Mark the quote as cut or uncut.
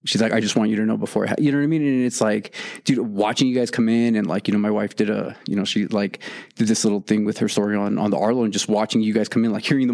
uncut